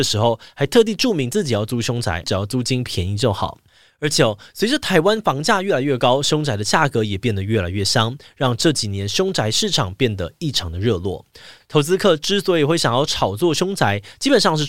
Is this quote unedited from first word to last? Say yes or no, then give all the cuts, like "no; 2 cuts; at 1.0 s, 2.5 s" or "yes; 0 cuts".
no; 2 cuts; at 2.2 s, 11.6 s